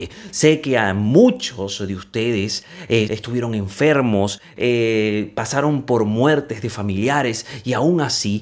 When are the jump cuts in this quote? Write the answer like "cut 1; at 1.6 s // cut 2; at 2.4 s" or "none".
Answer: cut 1; at 3.1 s